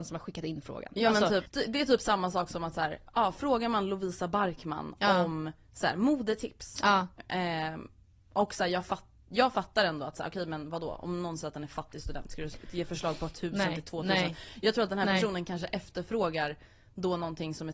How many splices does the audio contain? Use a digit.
2